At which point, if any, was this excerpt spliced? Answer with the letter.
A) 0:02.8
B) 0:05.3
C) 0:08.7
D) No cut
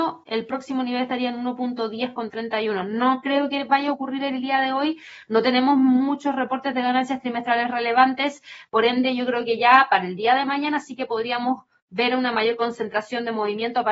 C